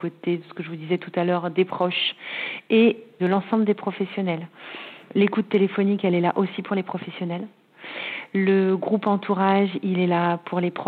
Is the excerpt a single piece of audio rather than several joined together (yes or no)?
yes